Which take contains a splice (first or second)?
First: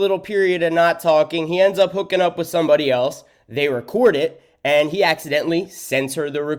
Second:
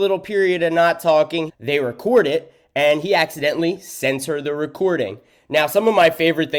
second